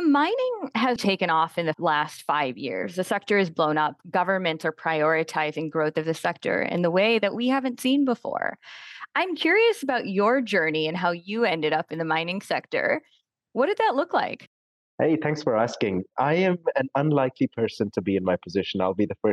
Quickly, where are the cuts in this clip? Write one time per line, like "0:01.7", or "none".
0:01.0